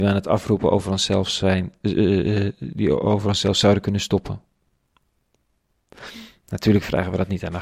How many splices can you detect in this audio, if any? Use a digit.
0